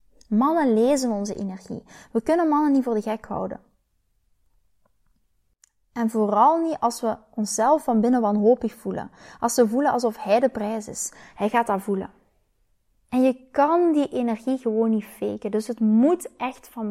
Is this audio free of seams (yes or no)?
yes